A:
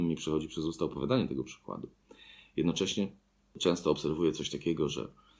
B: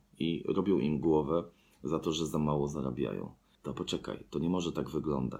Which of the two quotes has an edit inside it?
B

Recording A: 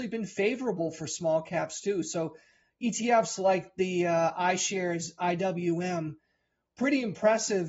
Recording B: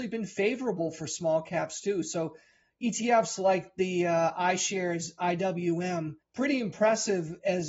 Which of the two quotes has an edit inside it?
B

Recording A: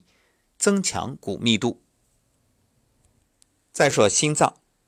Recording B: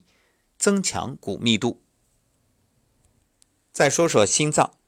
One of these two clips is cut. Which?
A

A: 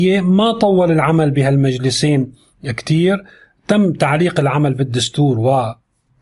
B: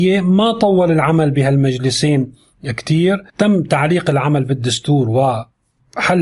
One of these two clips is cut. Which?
B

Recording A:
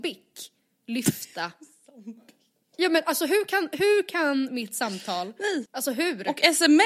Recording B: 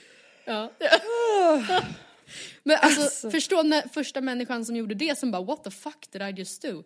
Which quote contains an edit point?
A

